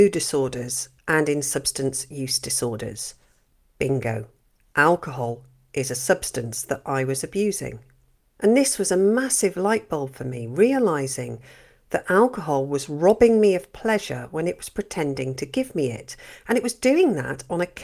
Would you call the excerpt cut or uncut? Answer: uncut